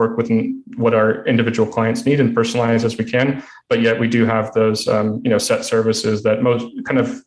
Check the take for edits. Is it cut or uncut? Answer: uncut